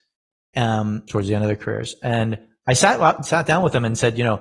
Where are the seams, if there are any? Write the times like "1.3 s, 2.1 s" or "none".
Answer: 1.1 s